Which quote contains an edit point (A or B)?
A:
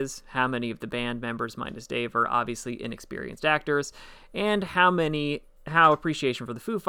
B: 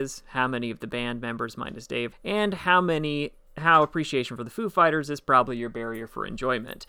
B